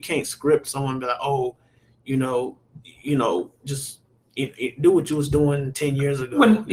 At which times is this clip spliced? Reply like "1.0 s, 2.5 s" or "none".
none

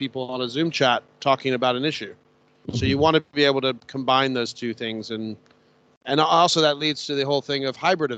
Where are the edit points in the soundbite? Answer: none

